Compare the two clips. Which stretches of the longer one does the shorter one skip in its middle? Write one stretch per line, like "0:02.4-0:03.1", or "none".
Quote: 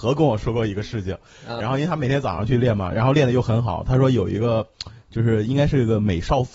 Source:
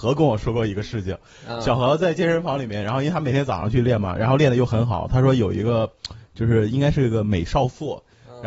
0:01.6-0:02.8